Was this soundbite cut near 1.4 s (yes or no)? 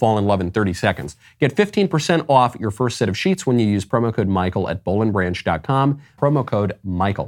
no